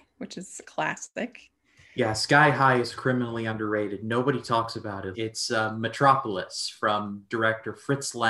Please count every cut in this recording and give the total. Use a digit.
1